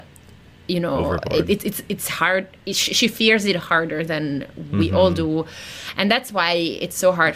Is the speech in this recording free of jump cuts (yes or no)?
yes